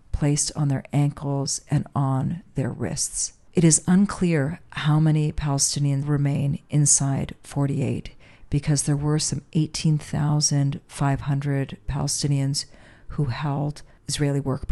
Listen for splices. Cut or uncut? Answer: cut